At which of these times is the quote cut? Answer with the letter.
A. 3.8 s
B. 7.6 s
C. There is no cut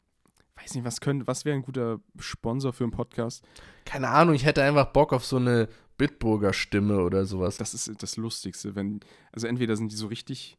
B